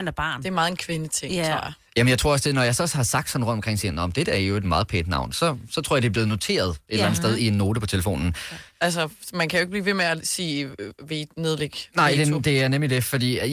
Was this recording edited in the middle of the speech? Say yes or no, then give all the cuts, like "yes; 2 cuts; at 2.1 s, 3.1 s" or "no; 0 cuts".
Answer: yes; 1 cut; at 8.7 s